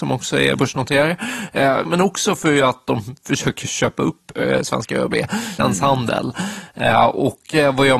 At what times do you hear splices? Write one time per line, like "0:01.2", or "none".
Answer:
0:01.8
0:05.6